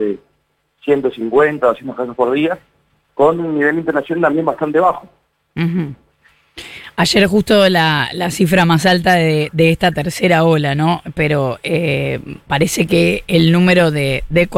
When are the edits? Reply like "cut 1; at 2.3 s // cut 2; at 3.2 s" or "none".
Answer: none